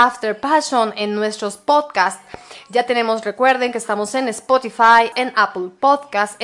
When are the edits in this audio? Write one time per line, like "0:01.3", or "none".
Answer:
0:05.1